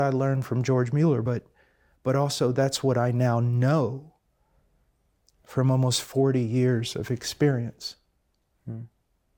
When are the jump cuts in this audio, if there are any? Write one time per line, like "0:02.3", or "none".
none